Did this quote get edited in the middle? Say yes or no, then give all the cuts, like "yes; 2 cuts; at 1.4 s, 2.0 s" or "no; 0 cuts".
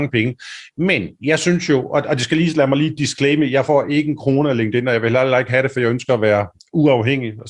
no; 0 cuts